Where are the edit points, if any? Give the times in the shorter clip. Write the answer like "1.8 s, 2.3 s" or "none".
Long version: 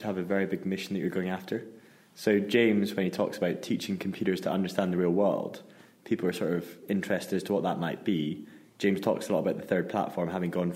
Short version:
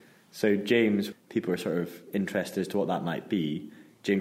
1.1 s